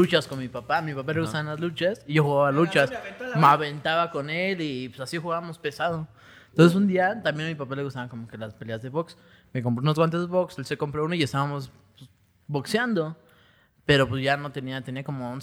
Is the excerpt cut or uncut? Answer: uncut